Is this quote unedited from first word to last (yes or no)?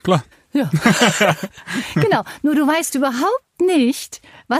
yes